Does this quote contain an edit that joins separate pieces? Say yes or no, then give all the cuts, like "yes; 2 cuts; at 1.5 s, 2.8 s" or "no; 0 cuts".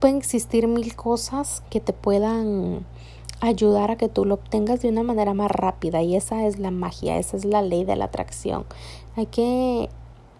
yes; 2 cuts; at 1.6 s, 9.1 s